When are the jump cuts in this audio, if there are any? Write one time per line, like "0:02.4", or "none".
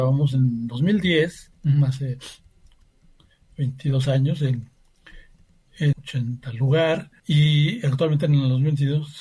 0:01.5
0:05.9
0:07.2